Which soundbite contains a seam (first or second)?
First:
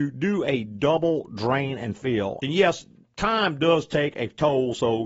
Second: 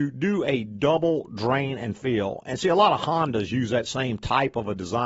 first